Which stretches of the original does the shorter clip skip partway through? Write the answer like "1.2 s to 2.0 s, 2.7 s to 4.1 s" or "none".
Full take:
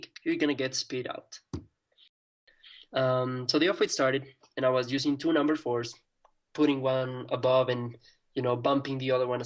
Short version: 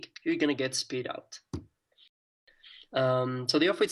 none